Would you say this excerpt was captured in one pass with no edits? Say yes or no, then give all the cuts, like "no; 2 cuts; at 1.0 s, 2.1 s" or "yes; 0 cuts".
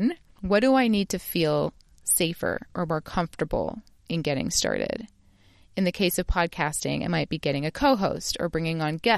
yes; 0 cuts